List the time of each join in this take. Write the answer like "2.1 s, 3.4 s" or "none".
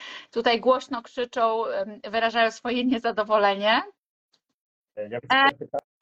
none